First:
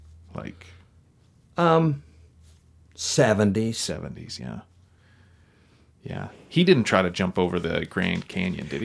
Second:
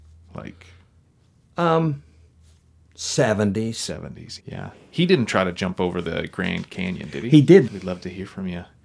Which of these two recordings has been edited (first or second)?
second